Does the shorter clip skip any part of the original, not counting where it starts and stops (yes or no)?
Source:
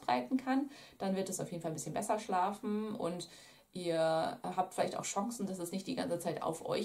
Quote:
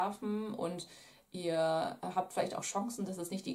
no